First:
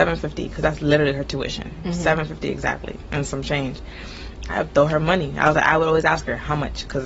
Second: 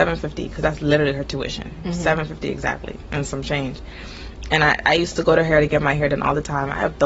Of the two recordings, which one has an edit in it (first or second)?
first